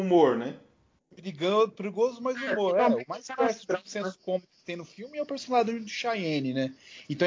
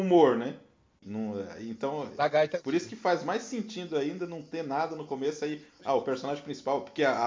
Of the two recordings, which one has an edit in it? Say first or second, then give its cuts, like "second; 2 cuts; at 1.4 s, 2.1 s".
second; 1 cut; at 1.0 s